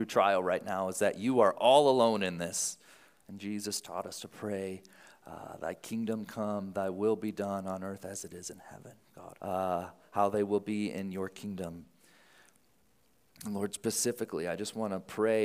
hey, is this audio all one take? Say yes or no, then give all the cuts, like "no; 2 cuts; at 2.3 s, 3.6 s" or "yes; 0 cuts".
no; 2 cuts; at 3.2 s, 9.4 s